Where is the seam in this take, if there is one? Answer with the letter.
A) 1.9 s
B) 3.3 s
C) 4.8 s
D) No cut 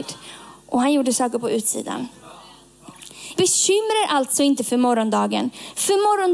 B